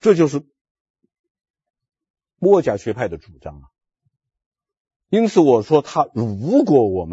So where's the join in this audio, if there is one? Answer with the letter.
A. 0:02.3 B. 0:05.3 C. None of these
C